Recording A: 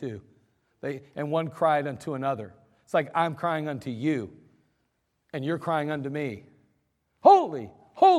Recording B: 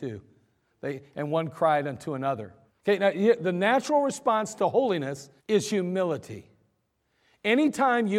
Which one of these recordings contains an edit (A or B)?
B